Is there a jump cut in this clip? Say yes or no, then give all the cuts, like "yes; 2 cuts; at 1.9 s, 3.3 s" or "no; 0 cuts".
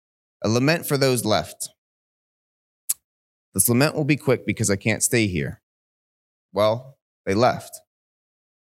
no; 0 cuts